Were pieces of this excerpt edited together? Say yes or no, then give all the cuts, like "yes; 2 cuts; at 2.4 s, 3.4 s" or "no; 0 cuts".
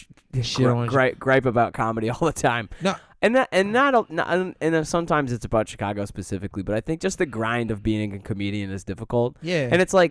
no; 0 cuts